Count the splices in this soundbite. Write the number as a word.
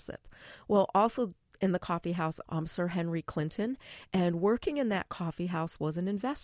one